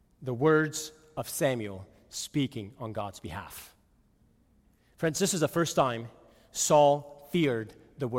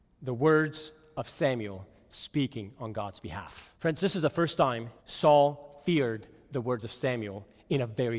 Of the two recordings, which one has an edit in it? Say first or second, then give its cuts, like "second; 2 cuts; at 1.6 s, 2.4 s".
second; 2 cuts; at 3.8 s, 5.0 s